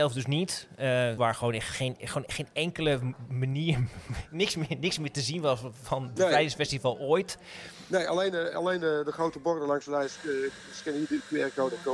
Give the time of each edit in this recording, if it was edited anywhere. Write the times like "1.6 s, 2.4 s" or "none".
1.2 s